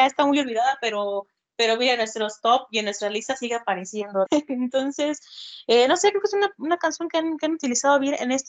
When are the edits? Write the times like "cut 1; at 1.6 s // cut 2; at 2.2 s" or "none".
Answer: cut 1; at 4.3 s